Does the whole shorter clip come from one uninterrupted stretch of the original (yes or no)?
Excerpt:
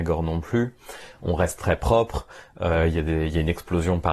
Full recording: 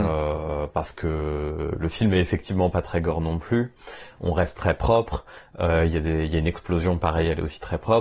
yes